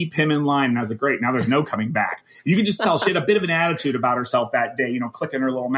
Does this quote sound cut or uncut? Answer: uncut